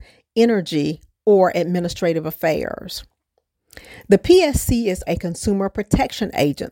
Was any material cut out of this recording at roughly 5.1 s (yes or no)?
yes